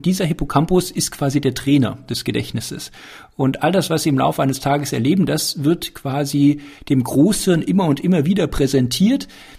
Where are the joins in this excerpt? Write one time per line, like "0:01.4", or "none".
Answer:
none